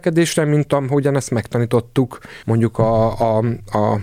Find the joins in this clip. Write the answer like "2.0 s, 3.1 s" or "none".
2.4 s